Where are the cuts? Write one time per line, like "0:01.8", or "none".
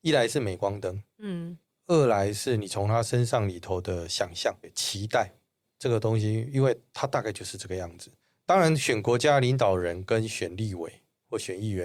none